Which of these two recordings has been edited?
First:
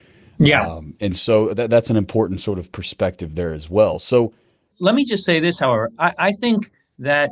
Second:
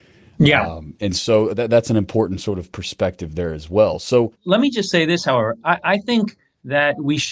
second; 1 cut; at 4.4 s

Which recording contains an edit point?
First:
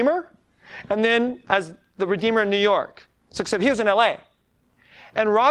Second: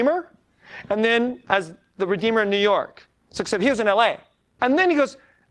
second; 1 cut; at 4.6 s

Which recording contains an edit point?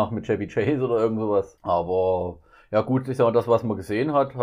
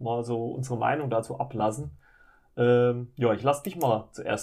first; 1 cut; at 1.6 s

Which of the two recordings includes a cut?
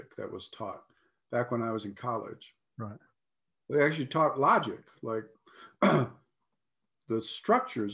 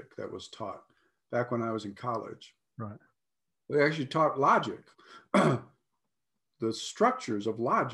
second; 1 cut; at 4.9 s

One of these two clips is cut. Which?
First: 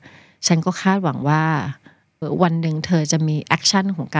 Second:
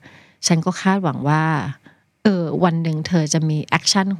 first; 1 cut; at 2.2 s

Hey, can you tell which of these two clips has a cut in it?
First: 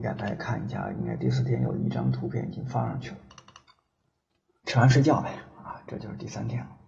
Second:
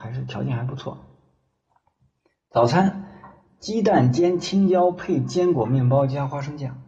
first; 1 cut; at 4.6 s

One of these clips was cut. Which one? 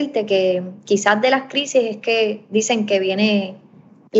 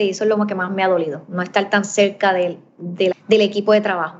second; 1 cut; at 3.1 s

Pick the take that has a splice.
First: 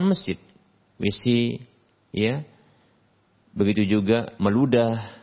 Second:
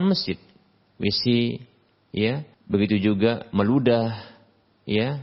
second; 1 cut; at 2.5 s

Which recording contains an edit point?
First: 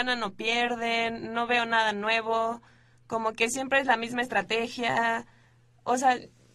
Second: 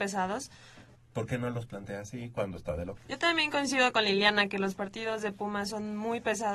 second; 2 cuts; at 0.9 s, 3.0 s

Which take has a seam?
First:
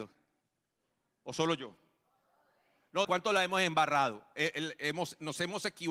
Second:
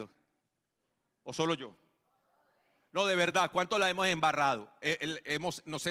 first; 1 cut; at 3.0 s

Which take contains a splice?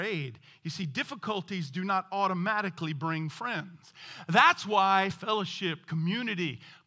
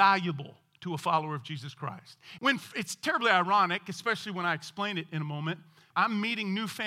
second; 2 cuts; at 2.4 s, 5.9 s

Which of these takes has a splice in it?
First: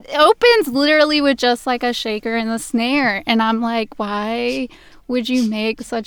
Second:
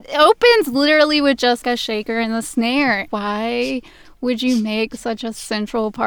second; 2 cuts; at 1.6 s, 3.1 s

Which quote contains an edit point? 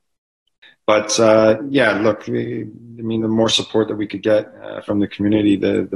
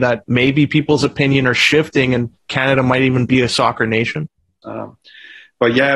second; 1 cut; at 4.6 s

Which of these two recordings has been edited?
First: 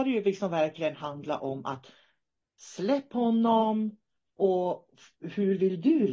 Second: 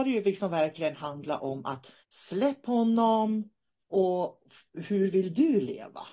second; 1 cut; at 2.0 s

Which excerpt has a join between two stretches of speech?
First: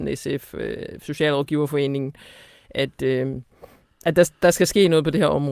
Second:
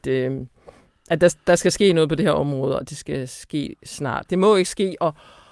second; 1 cut; at 4.3 s

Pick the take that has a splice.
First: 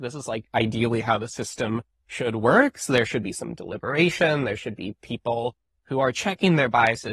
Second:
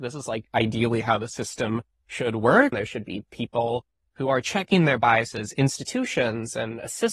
second; 1 cut; at 2.7 s

